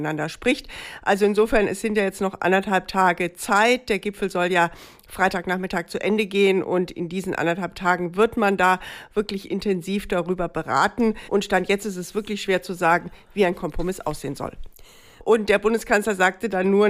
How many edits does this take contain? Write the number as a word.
one